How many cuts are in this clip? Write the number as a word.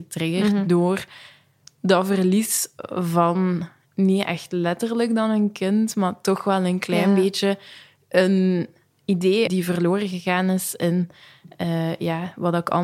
one